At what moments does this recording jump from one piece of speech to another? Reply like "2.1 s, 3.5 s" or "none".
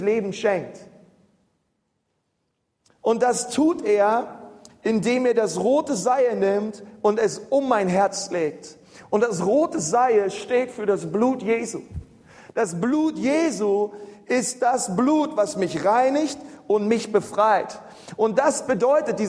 none